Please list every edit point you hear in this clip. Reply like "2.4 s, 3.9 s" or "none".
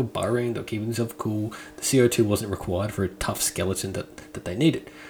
none